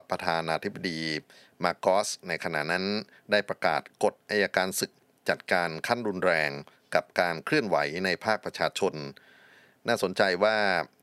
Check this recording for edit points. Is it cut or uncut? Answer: uncut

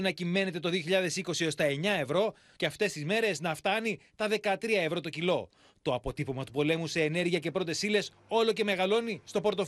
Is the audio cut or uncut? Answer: cut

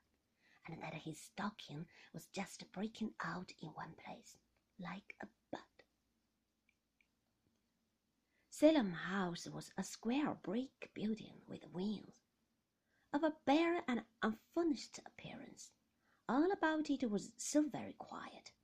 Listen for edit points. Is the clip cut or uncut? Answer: uncut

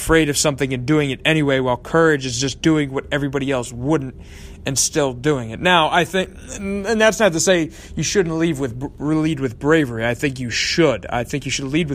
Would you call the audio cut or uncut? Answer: uncut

